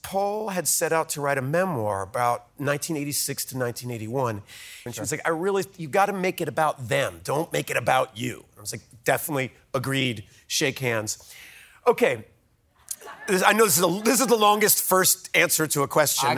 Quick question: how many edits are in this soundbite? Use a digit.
1